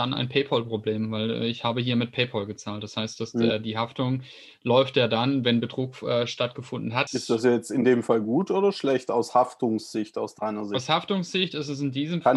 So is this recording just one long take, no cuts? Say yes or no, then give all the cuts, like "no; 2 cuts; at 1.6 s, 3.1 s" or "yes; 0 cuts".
no; 1 cut; at 7.1 s